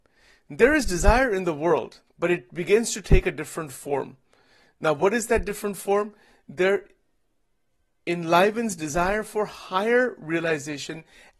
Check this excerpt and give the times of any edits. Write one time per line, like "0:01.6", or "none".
0:02.1